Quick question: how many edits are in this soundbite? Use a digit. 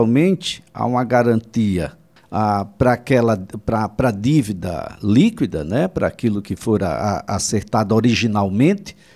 1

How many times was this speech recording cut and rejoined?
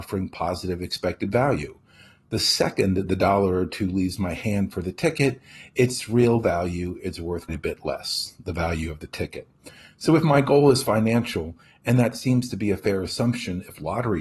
1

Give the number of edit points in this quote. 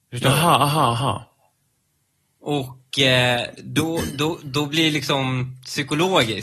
0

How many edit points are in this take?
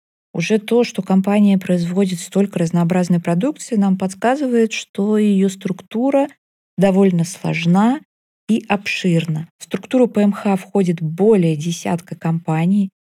0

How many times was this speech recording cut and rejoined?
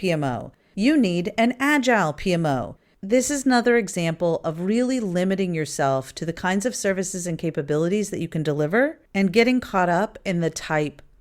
2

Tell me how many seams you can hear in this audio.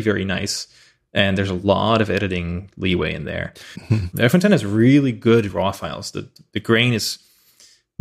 1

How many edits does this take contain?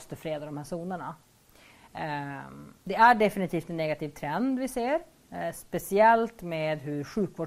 1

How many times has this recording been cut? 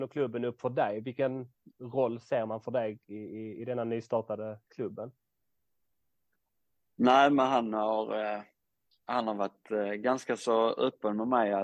0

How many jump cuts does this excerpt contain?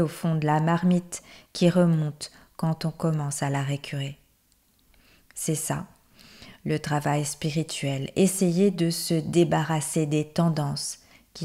0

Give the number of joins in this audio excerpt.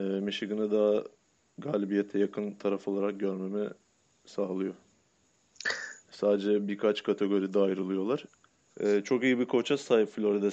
2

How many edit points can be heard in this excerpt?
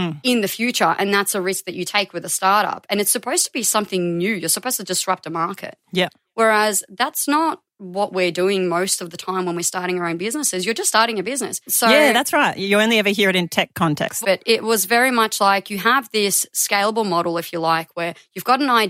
2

